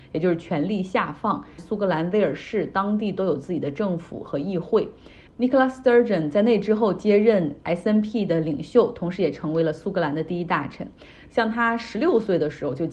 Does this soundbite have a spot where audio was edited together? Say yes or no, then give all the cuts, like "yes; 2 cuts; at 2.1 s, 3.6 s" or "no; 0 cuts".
yes; 3 cuts; at 1.6 s, 5.3 s, 11.3 s